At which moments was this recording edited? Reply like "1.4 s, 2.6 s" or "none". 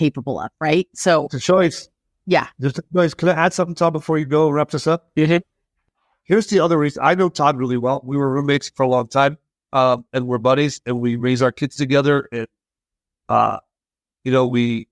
none